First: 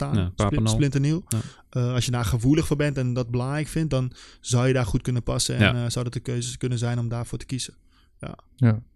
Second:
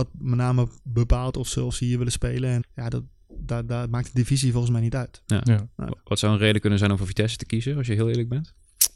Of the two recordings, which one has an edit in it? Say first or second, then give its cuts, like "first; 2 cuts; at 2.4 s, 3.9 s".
second; 1 cut; at 2.6 s